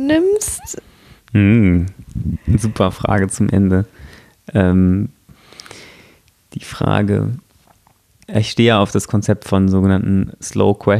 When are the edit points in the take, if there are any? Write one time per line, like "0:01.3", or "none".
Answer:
none